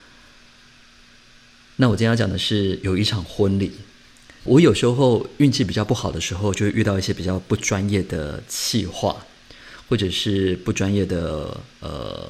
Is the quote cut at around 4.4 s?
yes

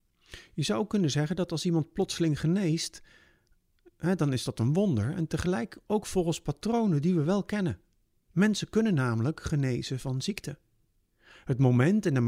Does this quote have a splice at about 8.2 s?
no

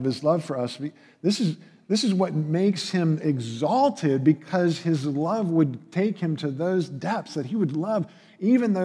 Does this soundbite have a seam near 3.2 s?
yes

